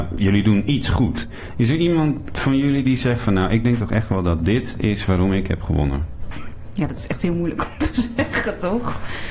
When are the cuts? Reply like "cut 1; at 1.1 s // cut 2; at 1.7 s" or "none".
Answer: none